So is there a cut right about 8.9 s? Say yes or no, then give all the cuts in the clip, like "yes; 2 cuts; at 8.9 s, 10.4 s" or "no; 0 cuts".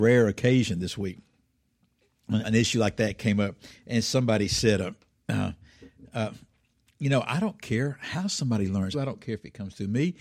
yes; 2 cuts; at 2.4 s, 8.9 s